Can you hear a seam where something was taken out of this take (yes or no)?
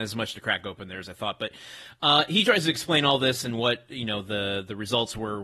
no